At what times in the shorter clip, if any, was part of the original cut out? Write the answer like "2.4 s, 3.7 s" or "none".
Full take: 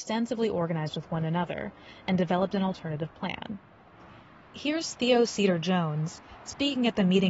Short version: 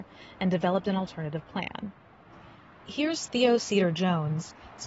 none